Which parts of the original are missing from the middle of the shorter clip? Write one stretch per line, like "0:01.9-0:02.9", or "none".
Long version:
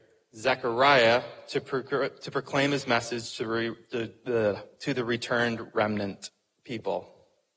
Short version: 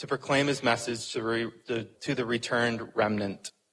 0:04.2-0:04.7